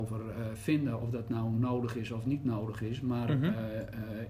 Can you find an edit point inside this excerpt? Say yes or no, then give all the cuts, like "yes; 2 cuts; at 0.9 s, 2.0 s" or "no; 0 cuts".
no; 0 cuts